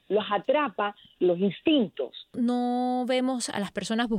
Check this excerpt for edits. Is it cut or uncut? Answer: cut